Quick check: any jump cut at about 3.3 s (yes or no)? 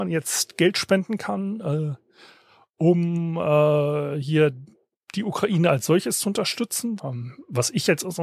no